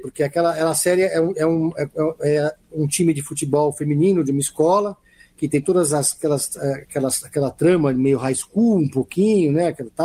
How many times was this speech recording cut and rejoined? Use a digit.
0